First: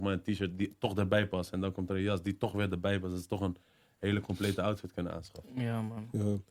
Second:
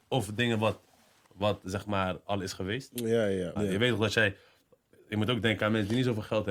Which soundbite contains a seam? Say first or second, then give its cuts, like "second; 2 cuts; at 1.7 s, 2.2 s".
second; 1 cut; at 3.6 s